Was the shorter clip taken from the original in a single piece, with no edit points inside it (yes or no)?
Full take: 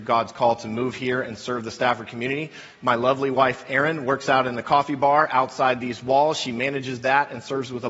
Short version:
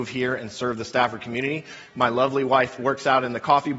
no